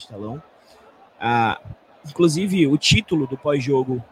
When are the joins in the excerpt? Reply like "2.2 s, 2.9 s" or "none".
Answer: none